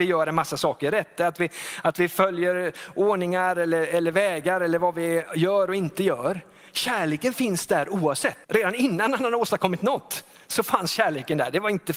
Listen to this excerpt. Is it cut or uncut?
cut